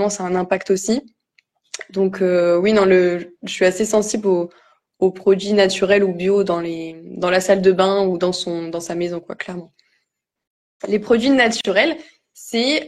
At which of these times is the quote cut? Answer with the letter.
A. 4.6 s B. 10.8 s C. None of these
B